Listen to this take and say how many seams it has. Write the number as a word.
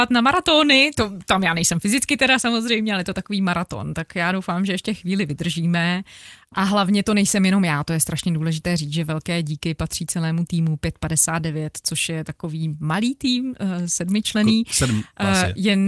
zero